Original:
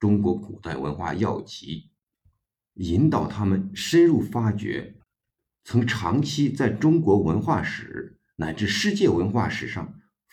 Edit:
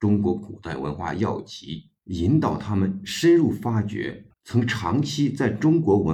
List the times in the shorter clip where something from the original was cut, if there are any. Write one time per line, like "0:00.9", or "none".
0:02.0
0:04.3